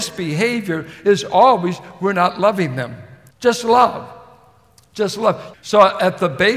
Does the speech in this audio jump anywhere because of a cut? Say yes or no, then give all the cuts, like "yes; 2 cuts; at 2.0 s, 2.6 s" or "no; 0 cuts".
yes; 2 cuts; at 3.3 s, 5.5 s